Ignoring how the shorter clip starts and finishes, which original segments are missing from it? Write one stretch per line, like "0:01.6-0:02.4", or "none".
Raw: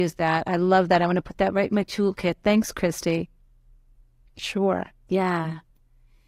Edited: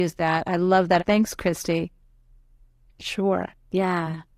0:01.0-0:02.4

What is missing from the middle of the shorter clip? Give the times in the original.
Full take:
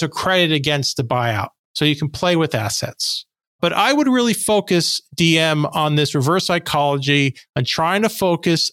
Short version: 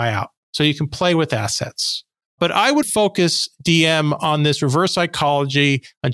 0:04.0-0:04.4

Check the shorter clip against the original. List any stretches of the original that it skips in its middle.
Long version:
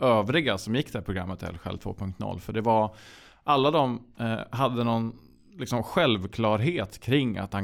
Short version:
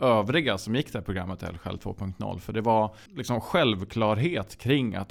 0:03.1-0:05.5

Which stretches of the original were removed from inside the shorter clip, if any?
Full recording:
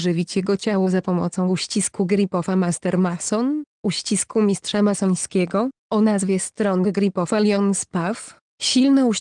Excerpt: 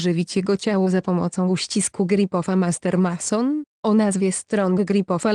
0:03.7-0:05.8

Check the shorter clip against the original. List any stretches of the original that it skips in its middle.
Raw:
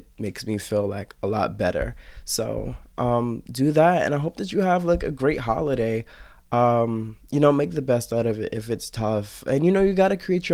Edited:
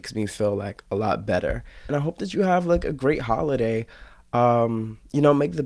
0:02.2-0:04.1

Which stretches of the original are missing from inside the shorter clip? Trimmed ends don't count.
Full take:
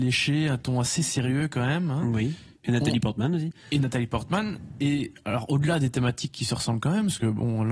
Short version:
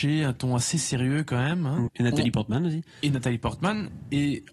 0:02.1-0:02.6

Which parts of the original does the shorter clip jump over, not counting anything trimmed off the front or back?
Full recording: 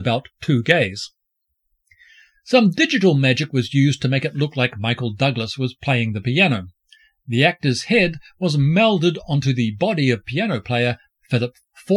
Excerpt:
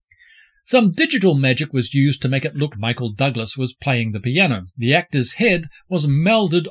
0:04.5-0:04.7
0:06.7-0:07.2

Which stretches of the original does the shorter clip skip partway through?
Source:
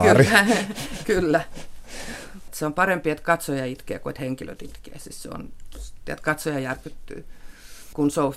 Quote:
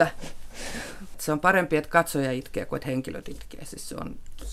none

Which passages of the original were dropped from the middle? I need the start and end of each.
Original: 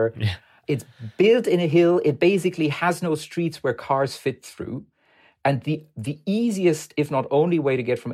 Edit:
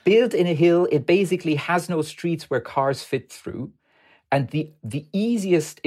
none

